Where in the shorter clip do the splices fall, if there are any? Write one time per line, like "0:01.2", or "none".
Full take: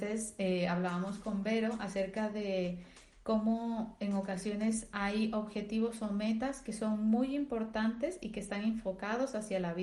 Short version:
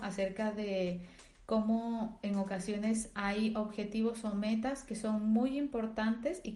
none